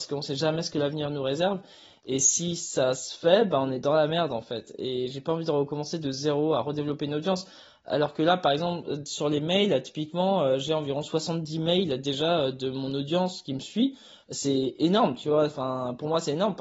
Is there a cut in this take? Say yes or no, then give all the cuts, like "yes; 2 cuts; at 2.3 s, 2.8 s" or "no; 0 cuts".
no; 0 cuts